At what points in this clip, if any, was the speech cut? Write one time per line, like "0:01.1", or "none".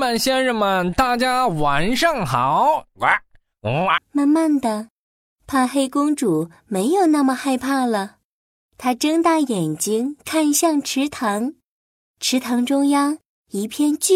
0:04.0